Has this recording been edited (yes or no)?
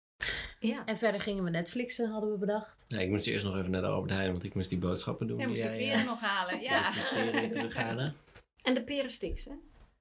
no